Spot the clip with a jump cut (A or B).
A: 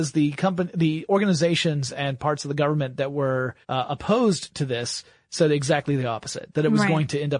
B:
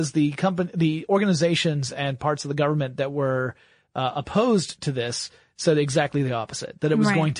A